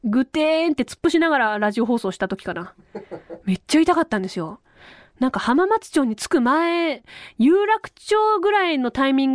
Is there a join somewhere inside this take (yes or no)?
no